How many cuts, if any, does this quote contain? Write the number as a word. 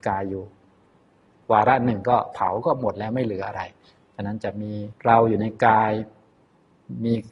one